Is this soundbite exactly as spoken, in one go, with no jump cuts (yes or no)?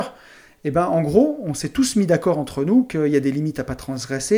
yes